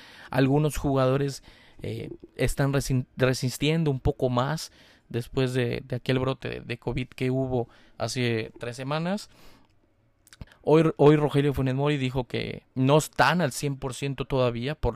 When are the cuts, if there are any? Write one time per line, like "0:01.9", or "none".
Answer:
0:10.5
0:12.7